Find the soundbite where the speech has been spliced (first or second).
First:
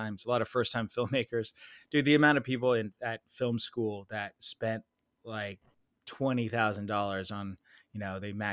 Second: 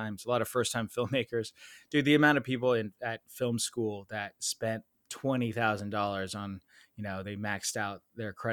second